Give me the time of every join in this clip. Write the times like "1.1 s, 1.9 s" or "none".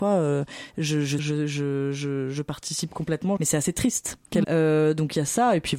1.2 s, 3.4 s, 4.4 s